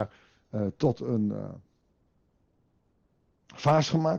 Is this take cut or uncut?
uncut